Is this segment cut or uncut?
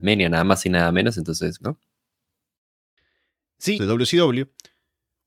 cut